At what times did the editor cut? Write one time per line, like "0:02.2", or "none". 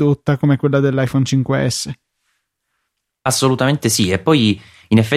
none